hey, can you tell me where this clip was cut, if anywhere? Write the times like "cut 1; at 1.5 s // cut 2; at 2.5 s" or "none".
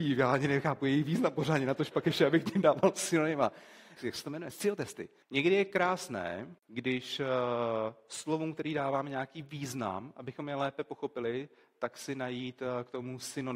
cut 1; at 4.0 s // cut 2; at 5.2 s // cut 3; at 6.6 s